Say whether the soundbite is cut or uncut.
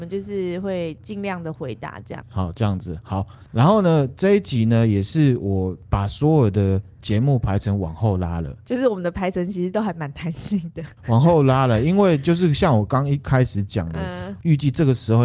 cut